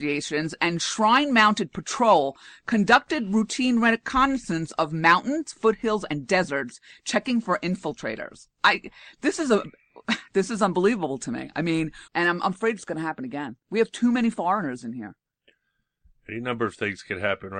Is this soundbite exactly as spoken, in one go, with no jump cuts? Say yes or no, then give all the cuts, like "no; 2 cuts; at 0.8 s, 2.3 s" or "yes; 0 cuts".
no; 1 cut; at 12.1 s